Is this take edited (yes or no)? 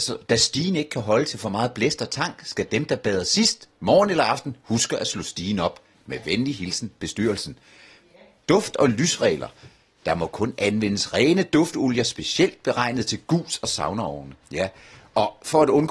no